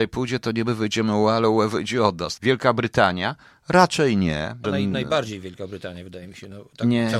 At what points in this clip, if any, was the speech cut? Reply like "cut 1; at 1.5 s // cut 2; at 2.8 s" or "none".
cut 1; at 2.4 s // cut 2; at 4.6 s